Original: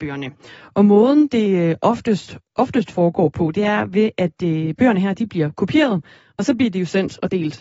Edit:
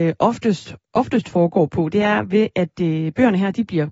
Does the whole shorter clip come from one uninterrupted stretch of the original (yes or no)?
yes